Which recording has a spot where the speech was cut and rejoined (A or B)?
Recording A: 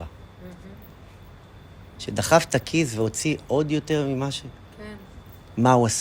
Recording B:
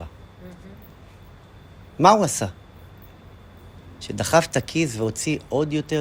A